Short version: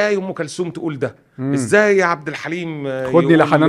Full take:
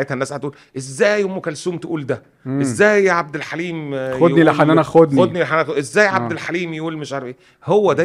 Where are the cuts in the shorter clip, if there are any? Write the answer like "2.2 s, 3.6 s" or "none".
none